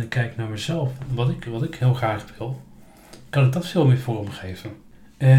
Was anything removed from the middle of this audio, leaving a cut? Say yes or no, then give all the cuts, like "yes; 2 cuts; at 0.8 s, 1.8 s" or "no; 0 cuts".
no; 0 cuts